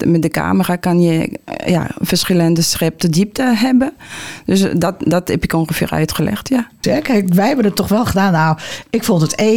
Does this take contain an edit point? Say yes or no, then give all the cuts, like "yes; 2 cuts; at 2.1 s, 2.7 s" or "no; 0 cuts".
yes; 1 cut; at 6.8 s